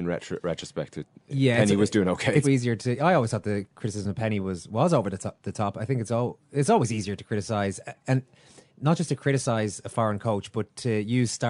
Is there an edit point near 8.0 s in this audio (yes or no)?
no